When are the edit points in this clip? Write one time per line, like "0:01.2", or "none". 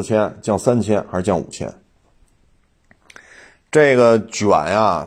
none